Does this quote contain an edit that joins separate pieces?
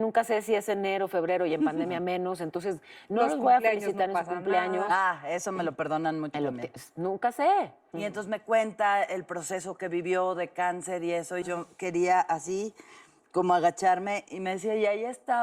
yes; 3 cuts; at 6.3 s, 7.9 s, 11.4 s

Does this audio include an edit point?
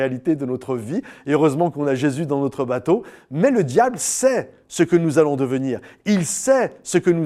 no; 0 cuts

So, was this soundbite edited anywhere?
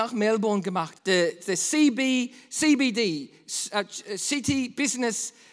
yes; 1 cut; at 0.9 s

